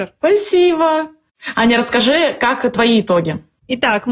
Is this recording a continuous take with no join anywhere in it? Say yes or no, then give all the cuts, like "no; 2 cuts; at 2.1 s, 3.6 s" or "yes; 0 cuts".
yes; 0 cuts